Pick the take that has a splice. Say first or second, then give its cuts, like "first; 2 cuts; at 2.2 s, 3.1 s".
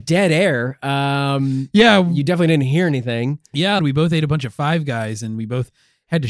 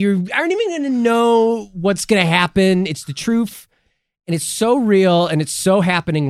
first; 1 cut; at 3.8 s